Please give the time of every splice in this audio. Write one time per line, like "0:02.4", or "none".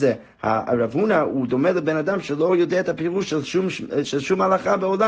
0:04.0